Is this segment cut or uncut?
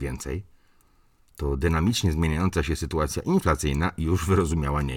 uncut